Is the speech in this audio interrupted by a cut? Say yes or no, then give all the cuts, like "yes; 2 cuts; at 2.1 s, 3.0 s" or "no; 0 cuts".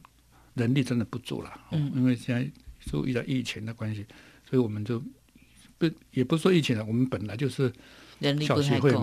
no; 0 cuts